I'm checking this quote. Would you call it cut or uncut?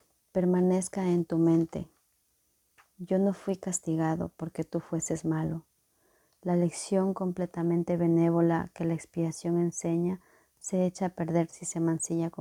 uncut